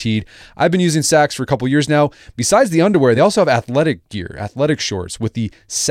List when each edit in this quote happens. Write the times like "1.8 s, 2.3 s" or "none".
none